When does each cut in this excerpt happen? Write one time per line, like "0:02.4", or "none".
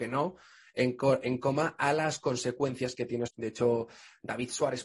0:03.3

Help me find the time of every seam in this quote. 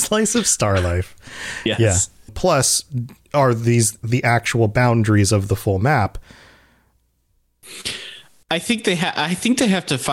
0:02.3

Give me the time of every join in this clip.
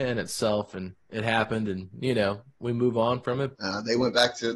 0:03.5

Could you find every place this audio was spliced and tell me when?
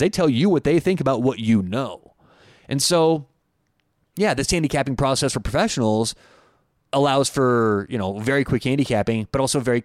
none

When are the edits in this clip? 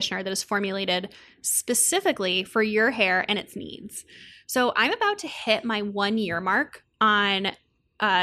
none

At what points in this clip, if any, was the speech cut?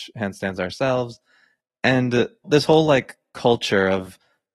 0:02.4

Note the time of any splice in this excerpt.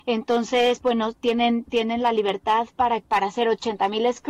0:03.0

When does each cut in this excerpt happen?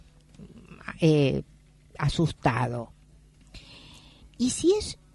none

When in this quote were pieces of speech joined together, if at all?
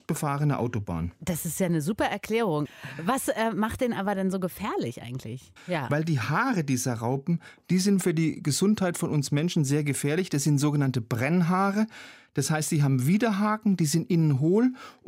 0:02.7
0:05.6

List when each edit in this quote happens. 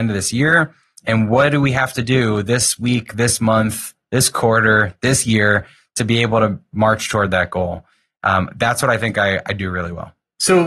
none

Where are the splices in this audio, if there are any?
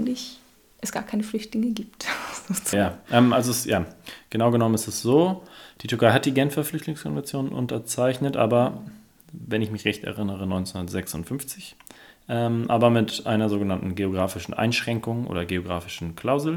0:02.7

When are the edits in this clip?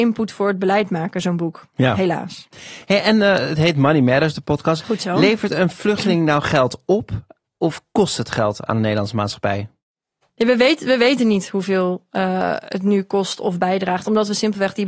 0:04.8

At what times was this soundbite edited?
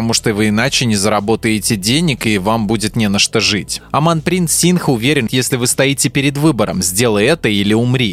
0:05.3

